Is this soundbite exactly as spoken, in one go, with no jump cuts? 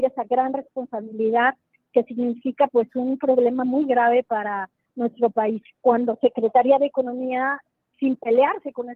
no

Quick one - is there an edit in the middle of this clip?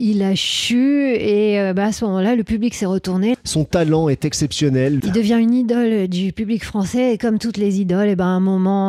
yes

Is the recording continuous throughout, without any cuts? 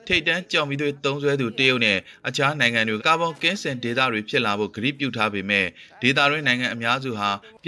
no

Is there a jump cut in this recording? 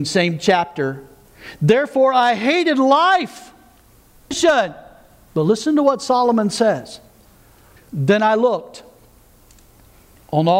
yes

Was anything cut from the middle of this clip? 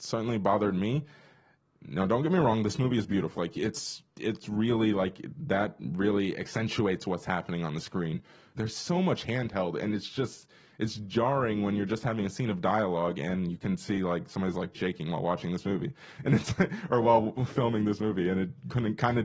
yes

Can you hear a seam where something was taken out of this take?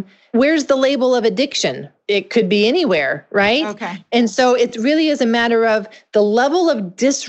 no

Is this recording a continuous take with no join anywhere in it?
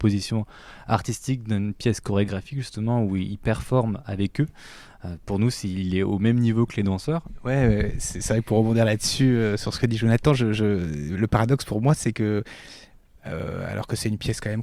yes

